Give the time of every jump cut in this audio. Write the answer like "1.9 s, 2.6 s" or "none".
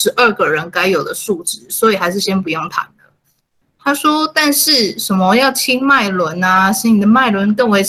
3.6 s